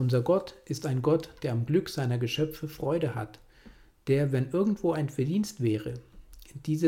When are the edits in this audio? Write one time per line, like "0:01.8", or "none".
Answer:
none